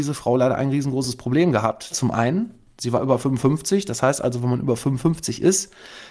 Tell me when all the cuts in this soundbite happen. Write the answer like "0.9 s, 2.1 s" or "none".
1.9 s